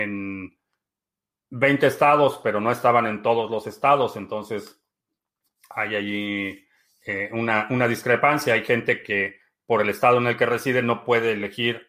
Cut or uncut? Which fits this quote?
uncut